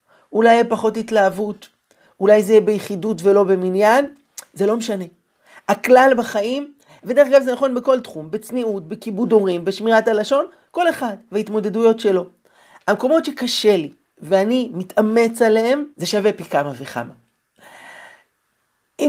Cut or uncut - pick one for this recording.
cut